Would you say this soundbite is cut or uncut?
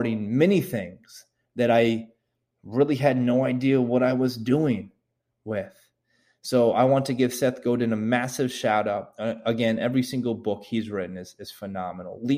uncut